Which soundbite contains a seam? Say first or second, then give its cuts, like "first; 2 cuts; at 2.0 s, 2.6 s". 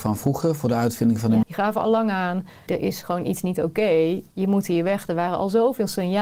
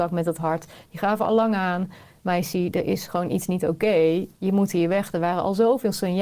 first; 2 cuts; at 1.4 s, 2.7 s